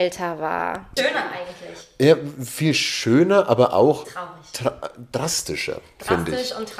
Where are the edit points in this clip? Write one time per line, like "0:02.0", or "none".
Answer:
0:01.0